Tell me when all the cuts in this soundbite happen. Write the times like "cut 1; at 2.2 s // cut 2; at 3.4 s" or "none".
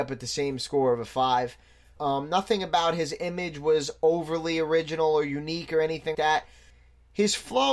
cut 1; at 2.0 s // cut 2; at 6.1 s